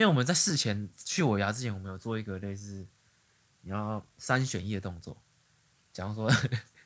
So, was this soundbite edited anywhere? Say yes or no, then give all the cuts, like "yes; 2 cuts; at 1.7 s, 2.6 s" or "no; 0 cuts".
no; 0 cuts